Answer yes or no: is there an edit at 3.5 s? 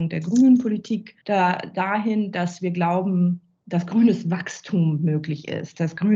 no